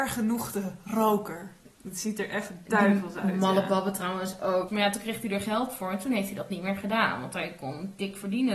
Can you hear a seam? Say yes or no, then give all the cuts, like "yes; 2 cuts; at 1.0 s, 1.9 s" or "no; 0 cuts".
yes; 2 cuts; at 1.7 s, 4.7 s